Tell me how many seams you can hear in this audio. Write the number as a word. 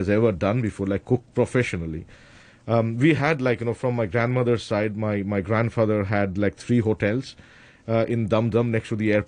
zero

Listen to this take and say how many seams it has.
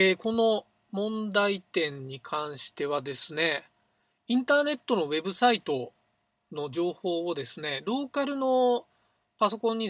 zero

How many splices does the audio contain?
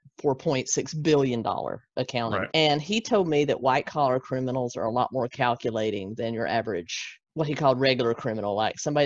two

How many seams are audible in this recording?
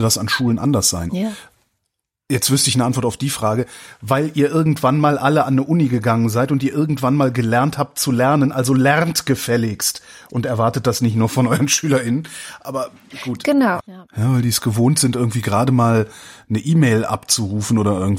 one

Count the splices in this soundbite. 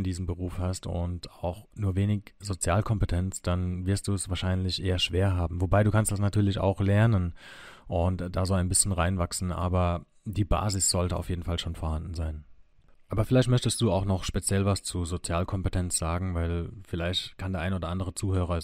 zero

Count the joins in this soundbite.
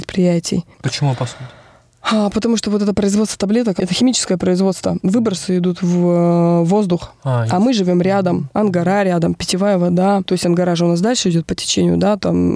zero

